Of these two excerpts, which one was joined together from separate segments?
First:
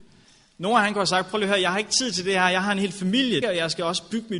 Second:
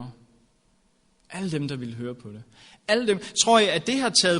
first; 1 cut; at 3.4 s

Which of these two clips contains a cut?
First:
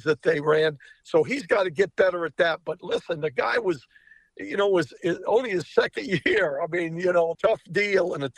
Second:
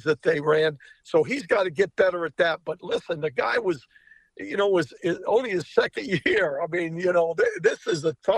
first; 1 cut; at 7.3 s

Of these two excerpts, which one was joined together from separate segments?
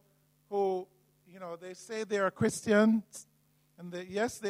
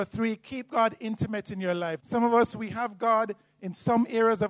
second; 1 cut; at 2.0 s

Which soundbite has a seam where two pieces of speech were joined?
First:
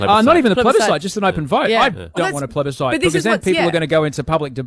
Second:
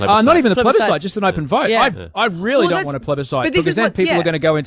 first; 1 cut; at 2.2 s

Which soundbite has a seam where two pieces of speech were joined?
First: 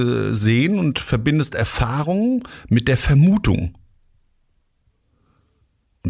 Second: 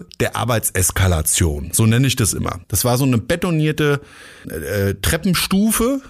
second; 2 cuts; at 2.6 s, 4.4 s

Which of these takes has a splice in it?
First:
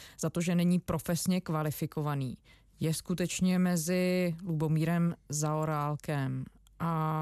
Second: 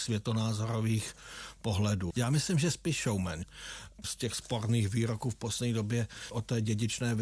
second; 2 cuts; at 2.1 s, 4.0 s

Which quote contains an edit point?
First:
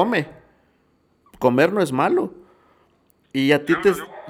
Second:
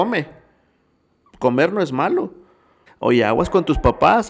second; 1 cut; at 2.9 s

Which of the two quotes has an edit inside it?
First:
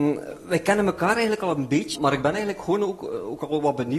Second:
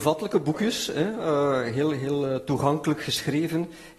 first; 1 cut; at 1.9 s

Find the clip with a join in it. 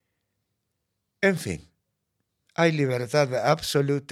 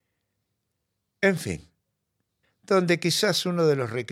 second; 1 cut; at 2.4 s

